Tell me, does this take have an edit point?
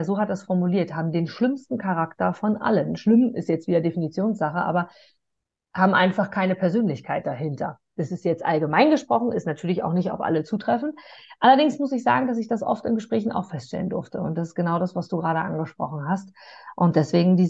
no; 0 cuts

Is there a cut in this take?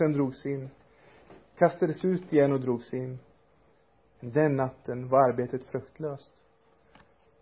yes; 1 cut; at 4.1 s

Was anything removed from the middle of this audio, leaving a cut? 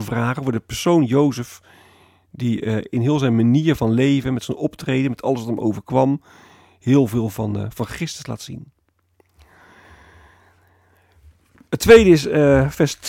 no; 0 cuts

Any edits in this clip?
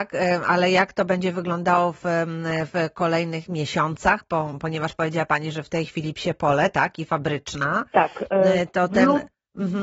no; 0 cuts

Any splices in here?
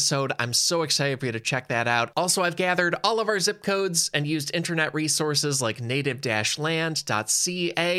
yes; 1 cut; at 2.1 s

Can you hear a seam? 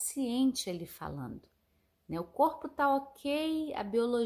no; 0 cuts

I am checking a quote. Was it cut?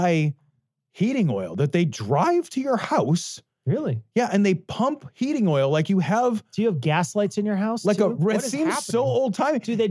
yes; 1 cut; at 8.3 s

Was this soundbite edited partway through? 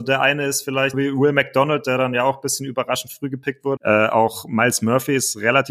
yes; 2 cuts; at 0.9 s, 3.8 s

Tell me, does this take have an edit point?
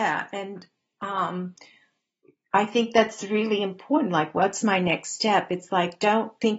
no; 0 cuts

